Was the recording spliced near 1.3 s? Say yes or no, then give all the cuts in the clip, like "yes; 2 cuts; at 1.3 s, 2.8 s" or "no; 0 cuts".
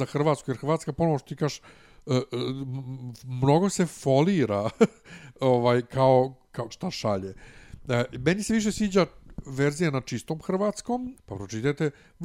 no; 2 cuts; at 6.7 s, 11.2 s